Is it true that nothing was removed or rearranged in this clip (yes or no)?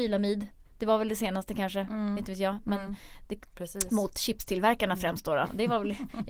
no